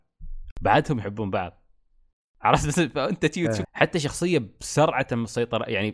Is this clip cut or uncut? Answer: cut